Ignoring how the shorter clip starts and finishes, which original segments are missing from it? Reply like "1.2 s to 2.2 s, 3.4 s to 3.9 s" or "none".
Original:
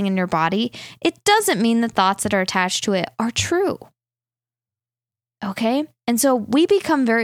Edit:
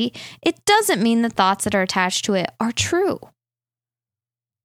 none